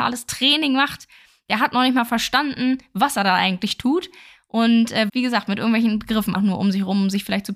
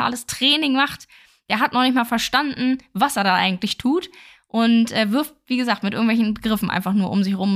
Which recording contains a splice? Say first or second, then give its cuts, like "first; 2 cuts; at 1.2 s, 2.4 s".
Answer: first; 2 cuts; at 5.1 s, 6.4 s